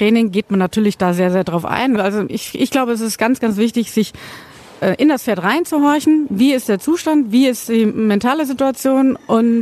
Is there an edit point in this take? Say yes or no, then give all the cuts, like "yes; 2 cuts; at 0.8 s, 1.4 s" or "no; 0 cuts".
yes; 1 cut; at 2.0 s